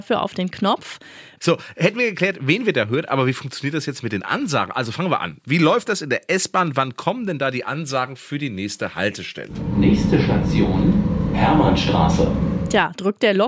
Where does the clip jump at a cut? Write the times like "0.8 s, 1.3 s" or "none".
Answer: 1.4 s